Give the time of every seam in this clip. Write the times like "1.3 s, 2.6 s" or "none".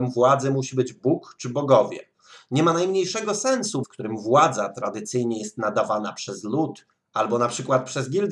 3.8 s